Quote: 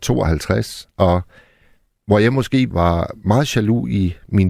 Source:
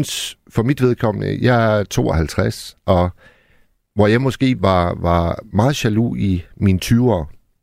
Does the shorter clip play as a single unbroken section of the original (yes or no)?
no